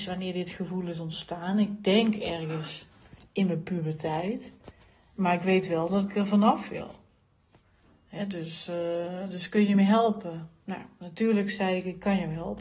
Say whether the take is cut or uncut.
uncut